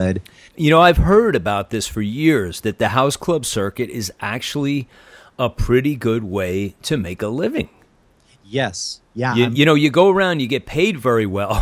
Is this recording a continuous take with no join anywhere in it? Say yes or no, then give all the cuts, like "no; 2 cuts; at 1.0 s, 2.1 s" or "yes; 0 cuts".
yes; 0 cuts